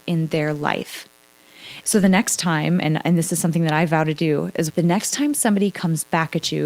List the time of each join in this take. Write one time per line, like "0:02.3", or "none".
0:01.8
0:04.7